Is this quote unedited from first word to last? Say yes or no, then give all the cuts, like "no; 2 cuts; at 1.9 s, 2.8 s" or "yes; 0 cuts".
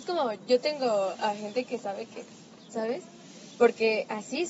no; 1 cut; at 2.7 s